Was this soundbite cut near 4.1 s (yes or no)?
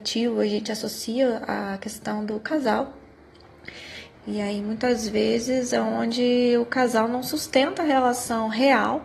yes